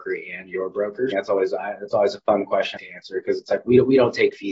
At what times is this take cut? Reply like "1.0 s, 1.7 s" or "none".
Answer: 1.1 s, 2.8 s